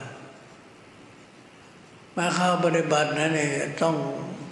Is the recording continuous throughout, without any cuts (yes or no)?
yes